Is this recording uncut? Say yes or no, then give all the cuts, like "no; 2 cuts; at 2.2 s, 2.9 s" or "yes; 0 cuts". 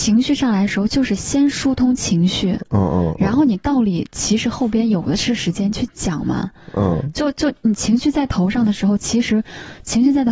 yes; 0 cuts